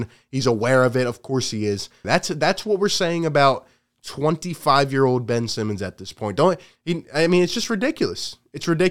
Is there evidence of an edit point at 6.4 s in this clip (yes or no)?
no